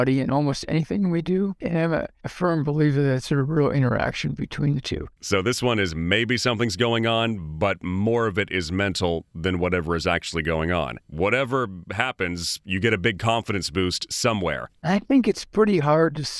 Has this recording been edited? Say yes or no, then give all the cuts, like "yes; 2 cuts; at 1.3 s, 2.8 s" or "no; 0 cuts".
yes; 2 cuts; at 11.0 s, 14.8 s